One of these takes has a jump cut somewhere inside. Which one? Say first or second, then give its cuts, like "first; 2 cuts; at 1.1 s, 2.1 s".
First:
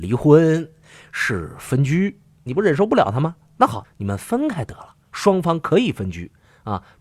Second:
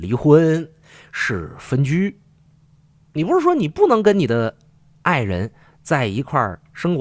first; 3 cuts; at 2.5 s, 3.8 s, 5.0 s